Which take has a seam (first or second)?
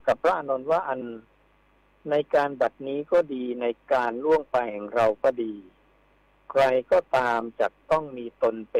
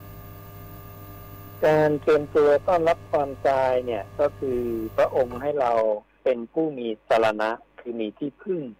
first